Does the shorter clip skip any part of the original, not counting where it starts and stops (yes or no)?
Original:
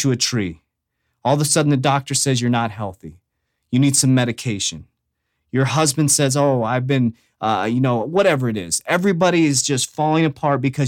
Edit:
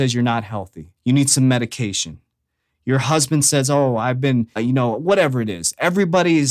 yes